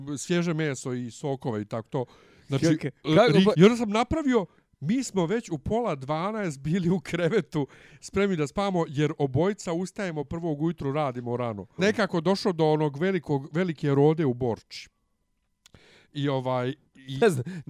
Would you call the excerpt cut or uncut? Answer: cut